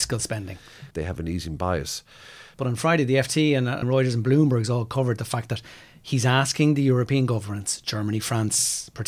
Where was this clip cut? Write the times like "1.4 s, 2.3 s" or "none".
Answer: 0.9 s, 2.5 s, 3.8 s

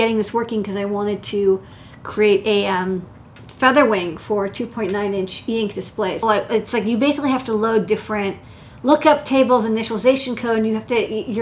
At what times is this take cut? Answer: 6.2 s

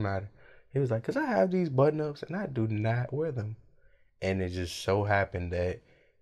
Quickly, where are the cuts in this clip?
none

